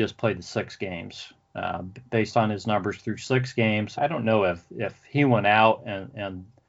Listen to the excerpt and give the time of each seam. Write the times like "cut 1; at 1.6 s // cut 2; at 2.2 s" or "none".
cut 1; at 4.0 s